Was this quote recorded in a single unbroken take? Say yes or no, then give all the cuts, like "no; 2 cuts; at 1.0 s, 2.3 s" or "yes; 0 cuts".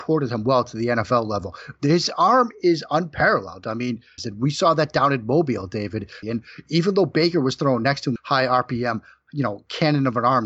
no; 3 cuts; at 4.2 s, 6.2 s, 8.2 s